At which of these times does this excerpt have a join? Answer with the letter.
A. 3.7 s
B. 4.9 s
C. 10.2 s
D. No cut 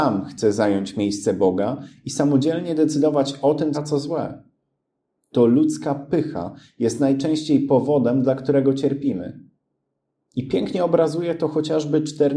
A